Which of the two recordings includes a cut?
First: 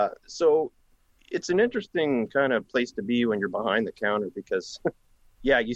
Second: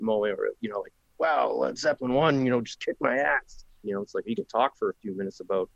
second; 1 cut; at 3.8 s

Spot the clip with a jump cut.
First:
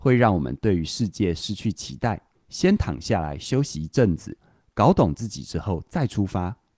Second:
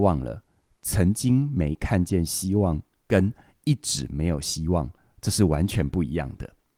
first; 1 cut; at 2.3 s

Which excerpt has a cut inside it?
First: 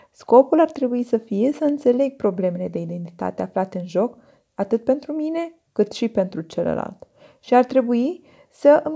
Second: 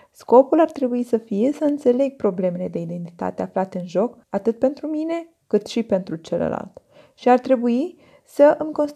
second; 1 cut; at 4.2 s

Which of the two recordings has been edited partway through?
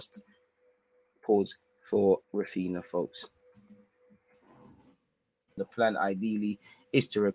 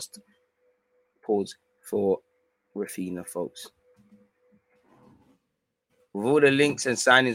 first; 2 cuts; at 2.2 s, 5.6 s

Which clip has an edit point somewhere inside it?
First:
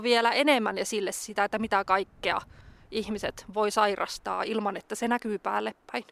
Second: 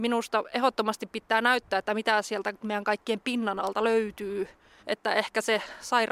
second; 1 cut; at 4.8 s

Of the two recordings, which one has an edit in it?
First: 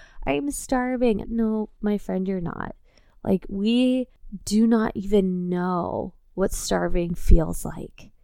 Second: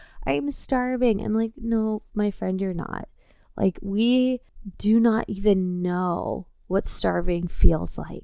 first; 1 cut; at 1.2 s

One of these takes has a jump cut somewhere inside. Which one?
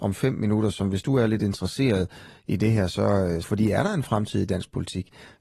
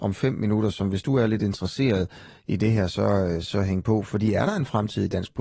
first; 1 cut; at 3.4 s

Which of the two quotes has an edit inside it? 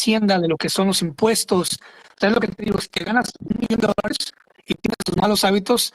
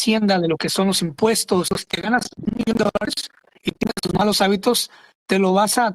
second; 1 cut; at 1.7 s

